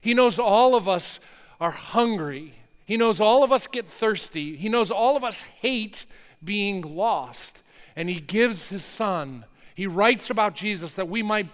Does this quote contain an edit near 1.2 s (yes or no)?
no